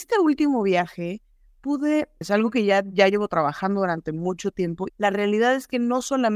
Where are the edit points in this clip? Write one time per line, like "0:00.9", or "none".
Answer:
0:02.2
0:04.9